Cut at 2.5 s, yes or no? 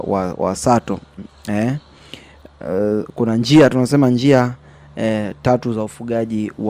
no